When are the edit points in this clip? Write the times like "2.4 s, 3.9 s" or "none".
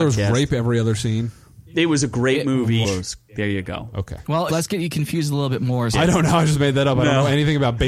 2.8 s, 4.5 s, 5.9 s